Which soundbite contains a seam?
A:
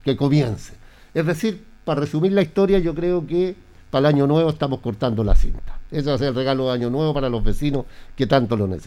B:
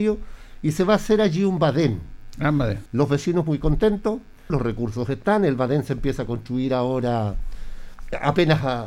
B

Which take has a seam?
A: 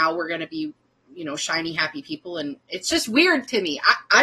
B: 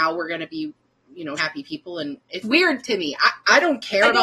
B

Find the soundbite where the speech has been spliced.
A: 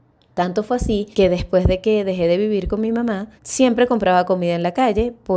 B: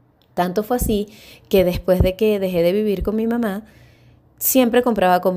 A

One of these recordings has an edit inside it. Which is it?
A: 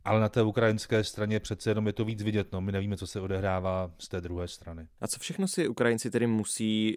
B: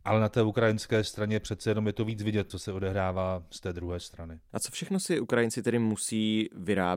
B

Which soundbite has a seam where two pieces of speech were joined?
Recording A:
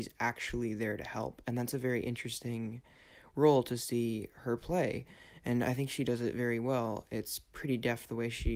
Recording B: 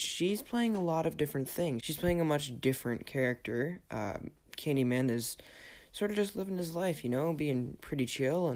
B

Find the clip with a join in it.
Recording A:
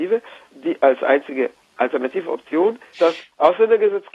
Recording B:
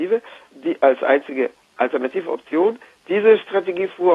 A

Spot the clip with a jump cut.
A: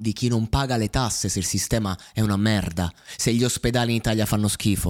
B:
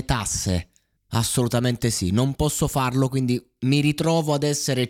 B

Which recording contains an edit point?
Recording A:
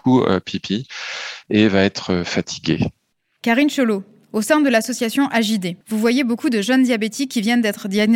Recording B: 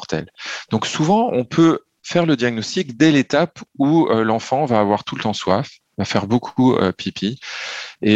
A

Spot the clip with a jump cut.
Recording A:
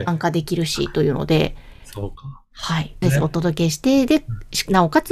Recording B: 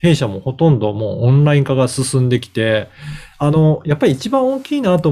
A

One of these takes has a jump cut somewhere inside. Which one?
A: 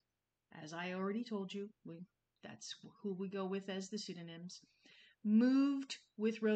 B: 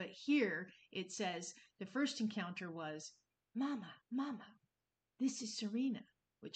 B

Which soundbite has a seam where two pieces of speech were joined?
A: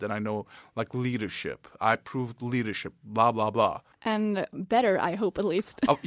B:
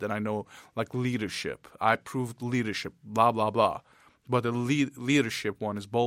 A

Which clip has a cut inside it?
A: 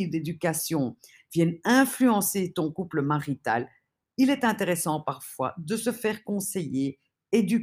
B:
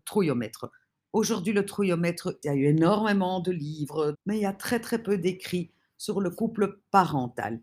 B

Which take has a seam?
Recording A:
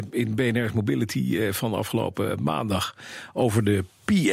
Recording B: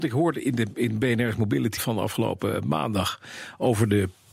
B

